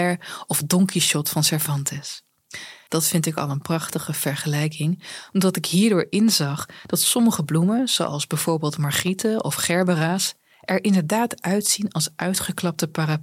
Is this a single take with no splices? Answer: no; 1 cut; at 2.9 s

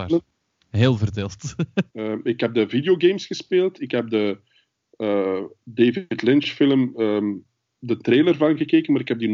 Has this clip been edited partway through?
yes; 1 cut; at 1.9 s

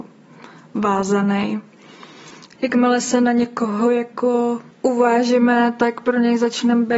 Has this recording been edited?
yes; 2 cuts; at 2.6 s, 4.7 s

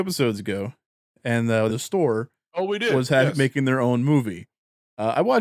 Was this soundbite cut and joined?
yes; 1 cut; at 1.7 s

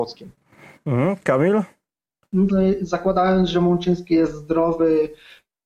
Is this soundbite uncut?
no; 1 cut; at 2.5 s

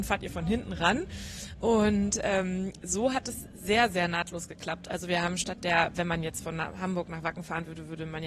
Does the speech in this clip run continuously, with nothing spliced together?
yes; 0 cuts

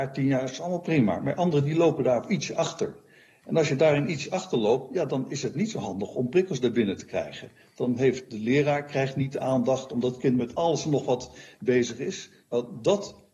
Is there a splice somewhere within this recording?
no; 0 cuts

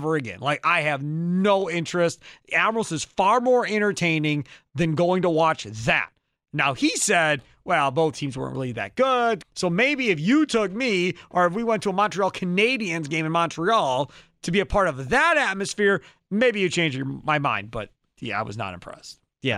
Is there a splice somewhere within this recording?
yes; 1 cut; at 9.4 s

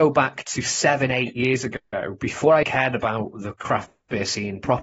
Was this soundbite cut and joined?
yes; 1 cut; at 2.6 s

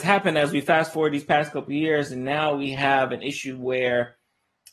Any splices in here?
no; 0 cuts

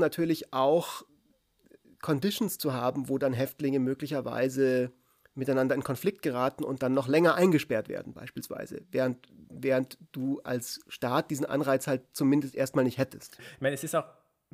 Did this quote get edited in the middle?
yes; 1 cut; at 13.4 s

